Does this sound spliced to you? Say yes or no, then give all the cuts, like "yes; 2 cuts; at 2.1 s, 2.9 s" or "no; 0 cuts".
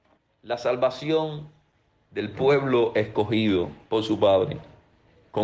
no; 0 cuts